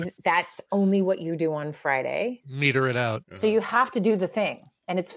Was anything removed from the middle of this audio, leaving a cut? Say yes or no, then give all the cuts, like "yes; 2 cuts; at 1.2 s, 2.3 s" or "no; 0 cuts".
yes; 1 cut; at 3.2 s